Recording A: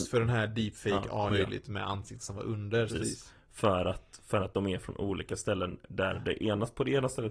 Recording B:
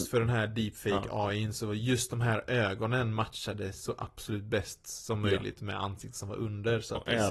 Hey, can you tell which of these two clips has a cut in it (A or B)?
A